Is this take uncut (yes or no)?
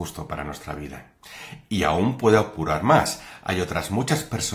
yes